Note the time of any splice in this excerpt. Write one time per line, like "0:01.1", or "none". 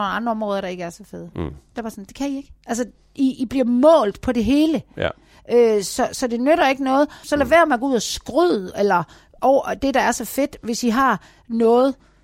0:02.6
0:07.2